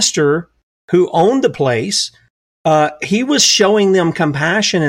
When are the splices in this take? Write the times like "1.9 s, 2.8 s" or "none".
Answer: none